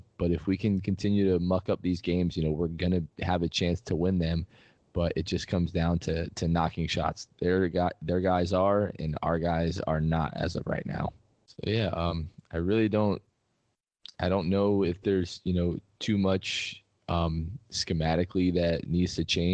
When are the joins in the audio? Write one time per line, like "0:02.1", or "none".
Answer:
none